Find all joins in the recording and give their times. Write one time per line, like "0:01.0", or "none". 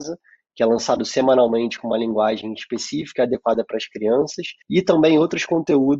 0:04.6